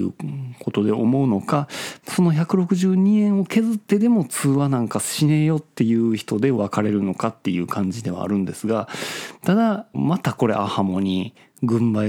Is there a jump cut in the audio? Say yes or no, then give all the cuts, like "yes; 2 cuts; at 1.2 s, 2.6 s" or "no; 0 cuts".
yes; 1 cut; at 9.9 s